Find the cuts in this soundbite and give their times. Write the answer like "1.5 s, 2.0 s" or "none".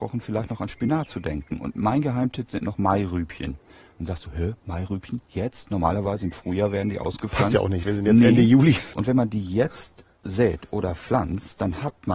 7.9 s, 8.9 s